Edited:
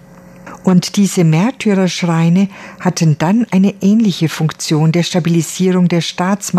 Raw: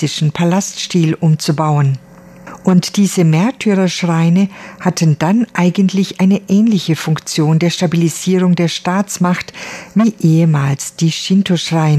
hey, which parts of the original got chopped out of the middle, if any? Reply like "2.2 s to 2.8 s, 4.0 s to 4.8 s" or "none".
5.5 s to 6.2 s

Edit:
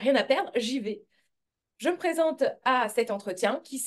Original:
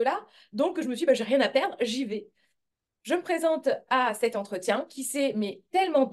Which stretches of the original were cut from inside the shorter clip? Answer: none

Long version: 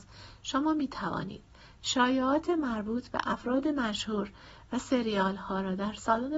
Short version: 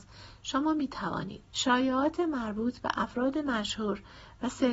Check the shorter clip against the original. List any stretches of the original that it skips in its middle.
1.5 s to 1.8 s

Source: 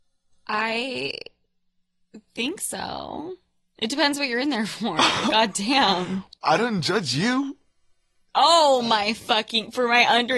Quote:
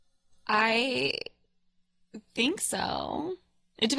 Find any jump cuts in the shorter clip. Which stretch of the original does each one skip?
none

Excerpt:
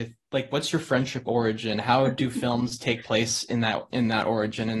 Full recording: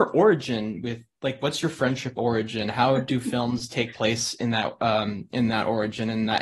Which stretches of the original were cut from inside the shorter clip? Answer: 4.8 s to 5.3 s

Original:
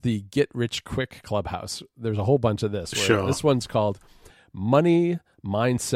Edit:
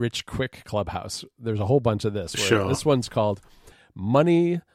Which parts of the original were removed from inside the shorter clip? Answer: none

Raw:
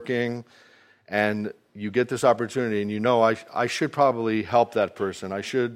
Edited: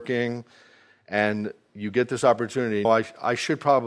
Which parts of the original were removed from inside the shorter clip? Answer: 2.8 s to 3.2 s

